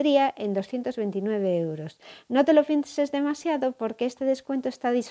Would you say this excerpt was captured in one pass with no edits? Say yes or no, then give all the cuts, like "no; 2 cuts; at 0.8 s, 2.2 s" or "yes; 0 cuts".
yes; 0 cuts